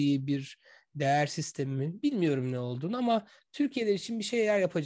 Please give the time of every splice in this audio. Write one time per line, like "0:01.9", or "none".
none

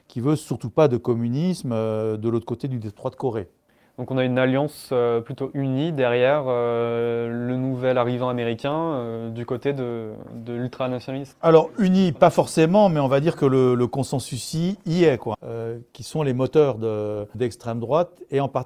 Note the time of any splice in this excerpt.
0:15.3
0:17.3

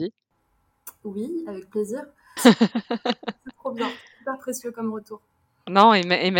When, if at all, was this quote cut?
0:02.4

